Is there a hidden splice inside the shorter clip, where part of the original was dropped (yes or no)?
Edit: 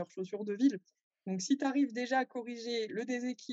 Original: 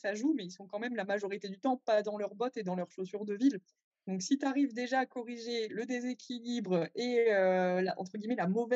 no